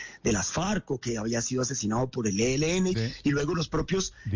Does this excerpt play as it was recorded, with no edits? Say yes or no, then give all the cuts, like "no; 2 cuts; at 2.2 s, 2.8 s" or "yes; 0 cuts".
no; 1 cut; at 2.9 s